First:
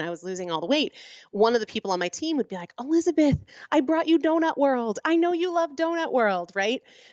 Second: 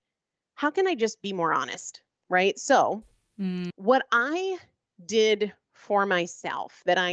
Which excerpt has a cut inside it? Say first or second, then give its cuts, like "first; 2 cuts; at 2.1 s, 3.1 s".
second; 1 cut; at 3.7 s